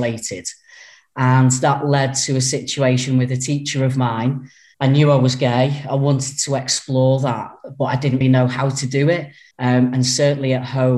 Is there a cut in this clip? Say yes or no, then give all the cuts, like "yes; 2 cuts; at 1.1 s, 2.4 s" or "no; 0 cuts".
yes; 3 cuts; at 4.7 s, 8.2 s, 9.5 s